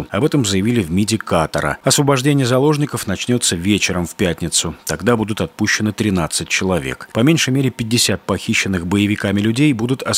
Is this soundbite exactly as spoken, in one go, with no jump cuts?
no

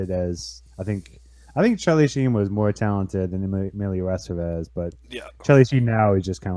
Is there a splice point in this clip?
no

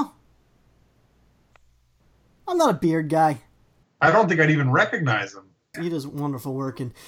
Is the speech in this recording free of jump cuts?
no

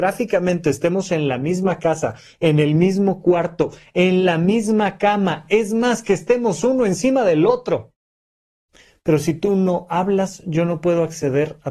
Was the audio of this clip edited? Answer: no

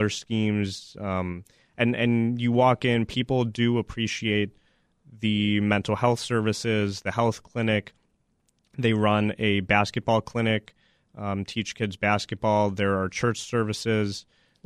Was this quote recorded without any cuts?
yes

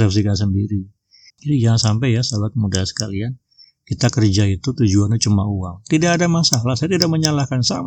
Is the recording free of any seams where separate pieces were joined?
no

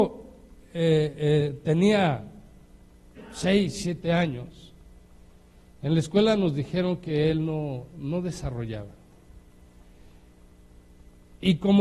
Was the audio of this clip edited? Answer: no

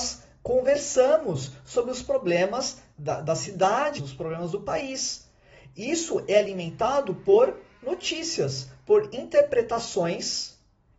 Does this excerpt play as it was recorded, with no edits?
no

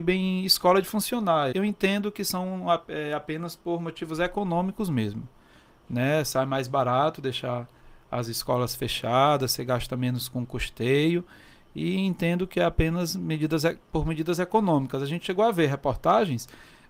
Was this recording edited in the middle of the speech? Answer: yes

